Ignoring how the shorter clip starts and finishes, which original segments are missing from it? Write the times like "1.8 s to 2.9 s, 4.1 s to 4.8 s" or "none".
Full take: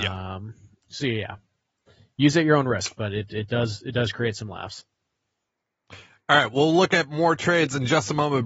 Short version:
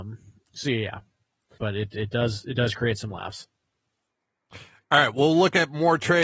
1.9 s to 3.0 s